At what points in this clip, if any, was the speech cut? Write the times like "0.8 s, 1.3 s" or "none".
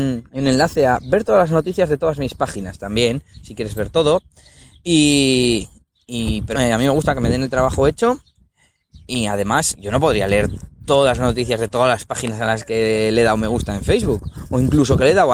6.5 s, 9.7 s